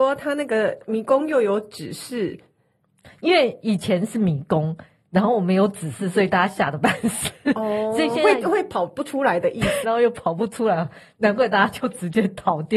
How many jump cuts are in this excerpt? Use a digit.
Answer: 1